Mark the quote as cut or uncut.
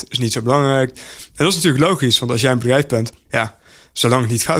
cut